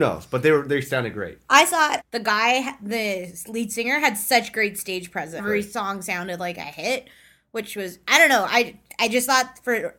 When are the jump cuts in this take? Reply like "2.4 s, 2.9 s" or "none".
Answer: 2.0 s, 5.4 s